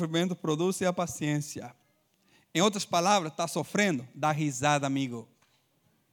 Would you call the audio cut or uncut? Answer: uncut